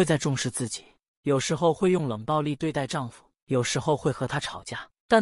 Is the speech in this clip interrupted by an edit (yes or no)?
yes